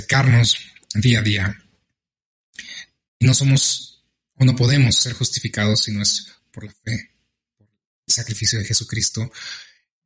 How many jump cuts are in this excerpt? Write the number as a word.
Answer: one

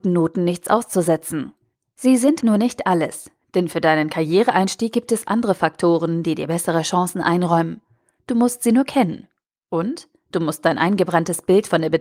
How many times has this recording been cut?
one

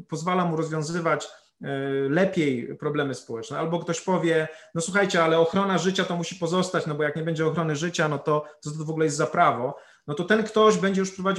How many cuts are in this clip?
zero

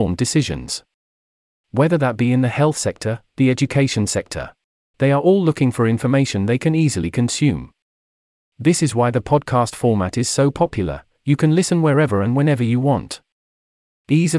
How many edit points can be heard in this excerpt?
one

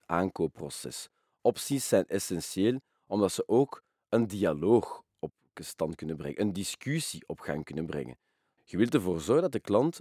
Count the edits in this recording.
one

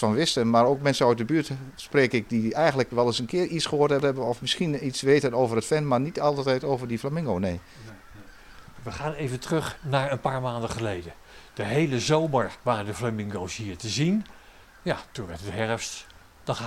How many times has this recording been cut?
one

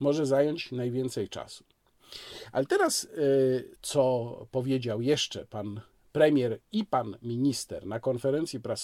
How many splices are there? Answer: one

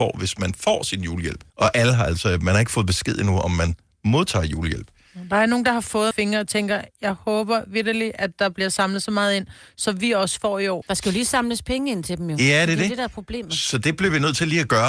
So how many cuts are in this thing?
three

